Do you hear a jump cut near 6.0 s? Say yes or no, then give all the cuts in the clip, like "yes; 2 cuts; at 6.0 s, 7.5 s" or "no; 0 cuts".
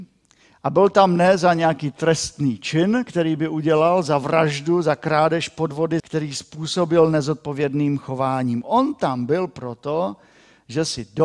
yes; 1 cut; at 6.0 s